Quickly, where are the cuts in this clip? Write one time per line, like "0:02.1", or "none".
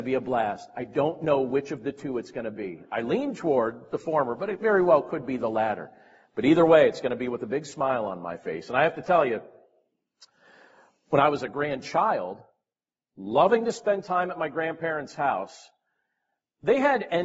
none